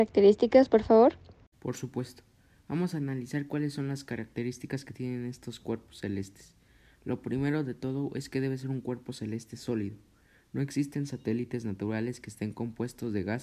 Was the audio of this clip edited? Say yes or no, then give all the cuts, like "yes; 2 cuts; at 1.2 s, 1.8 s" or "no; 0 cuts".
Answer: no; 0 cuts